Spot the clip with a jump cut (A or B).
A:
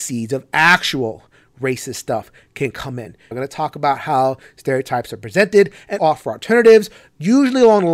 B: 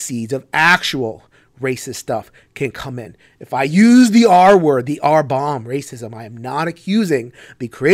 A